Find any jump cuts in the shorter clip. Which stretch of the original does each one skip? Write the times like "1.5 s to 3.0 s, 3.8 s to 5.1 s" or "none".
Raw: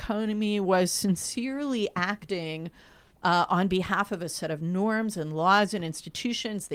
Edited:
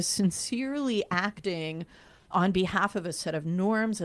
3.2 s to 3.5 s